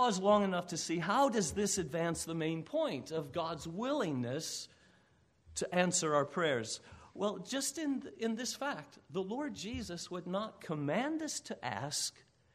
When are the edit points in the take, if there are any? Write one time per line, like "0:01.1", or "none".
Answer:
none